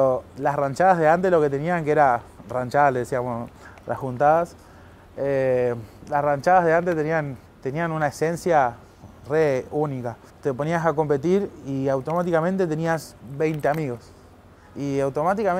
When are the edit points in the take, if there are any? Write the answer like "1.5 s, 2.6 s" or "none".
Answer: 7.5 s, 10.3 s

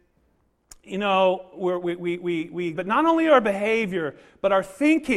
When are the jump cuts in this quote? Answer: 2.7 s

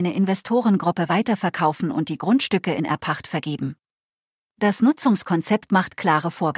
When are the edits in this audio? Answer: none

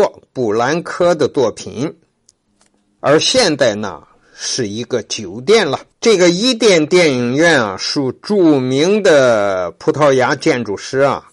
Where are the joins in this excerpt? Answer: 3.0 s, 5.9 s

